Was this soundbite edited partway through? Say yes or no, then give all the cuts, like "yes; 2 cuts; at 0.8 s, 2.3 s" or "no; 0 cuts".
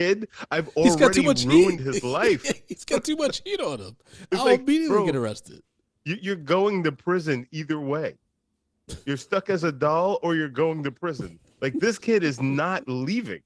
no; 0 cuts